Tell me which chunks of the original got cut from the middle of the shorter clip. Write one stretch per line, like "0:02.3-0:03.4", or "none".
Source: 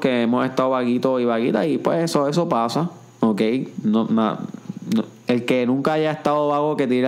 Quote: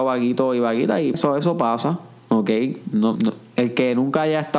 0:01.8-0:02.1
0:04.1-0:04.9